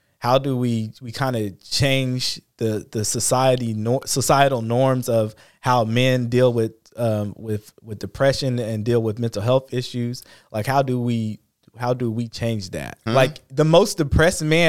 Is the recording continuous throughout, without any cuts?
no; 1 cut; at 13.1 s

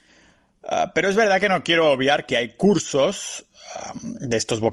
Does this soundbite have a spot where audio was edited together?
no; 0 cuts

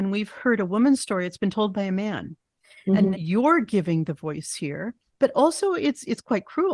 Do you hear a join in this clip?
yes; 2 cuts; at 3.1 s, 5.1 s

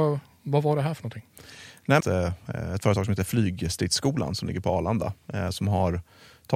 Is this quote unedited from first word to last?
no; 1 cut; at 2.0 s

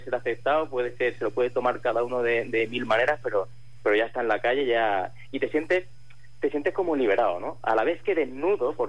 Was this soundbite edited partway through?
no; 0 cuts

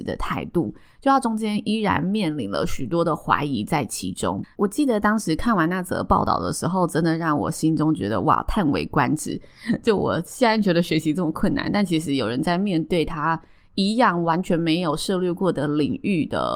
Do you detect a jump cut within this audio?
yes; 1 cut; at 4.4 s

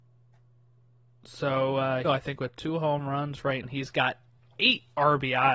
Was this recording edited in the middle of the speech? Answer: yes; 2 cuts; at 2.0 s, 3.6 s

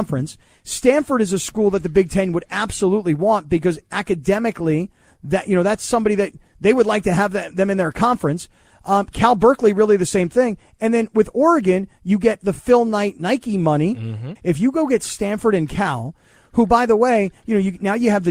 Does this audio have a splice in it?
yes; 1 cut; at 14.4 s

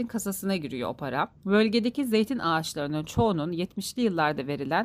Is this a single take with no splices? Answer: no; 1 cut; at 1.4 s

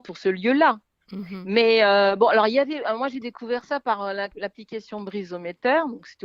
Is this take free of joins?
yes; 0 cuts

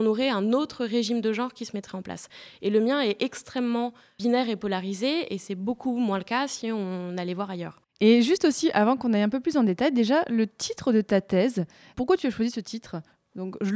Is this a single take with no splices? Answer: yes; 0 cuts

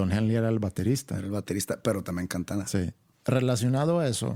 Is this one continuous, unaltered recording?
no; 1 cut; at 3.1 s

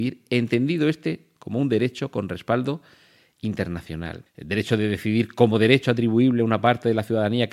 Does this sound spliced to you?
yes; 1 cut; at 4.3 s

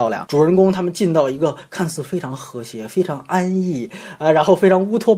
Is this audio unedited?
yes; 0 cuts

